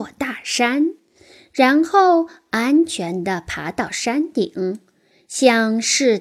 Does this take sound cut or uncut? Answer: uncut